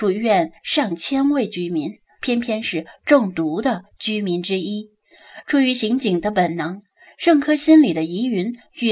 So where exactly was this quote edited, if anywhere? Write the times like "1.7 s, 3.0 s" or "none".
2.2 s